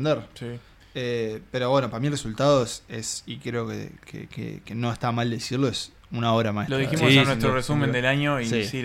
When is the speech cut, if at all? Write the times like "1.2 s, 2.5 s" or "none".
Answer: none